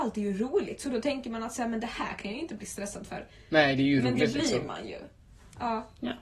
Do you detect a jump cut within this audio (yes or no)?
no